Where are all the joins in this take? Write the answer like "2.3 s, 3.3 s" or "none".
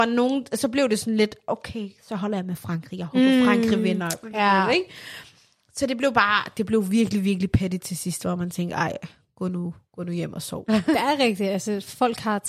10.7 s